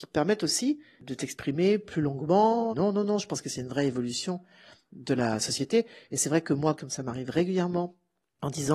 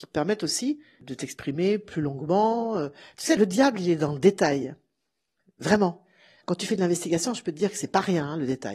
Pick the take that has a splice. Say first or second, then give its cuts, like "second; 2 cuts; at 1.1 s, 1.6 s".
first; 2 cuts; at 2.7 s, 6.8 s